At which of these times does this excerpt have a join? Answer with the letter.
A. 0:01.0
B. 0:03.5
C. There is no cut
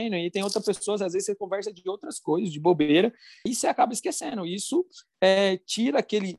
B